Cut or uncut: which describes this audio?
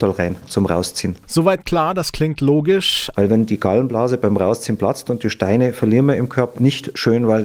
cut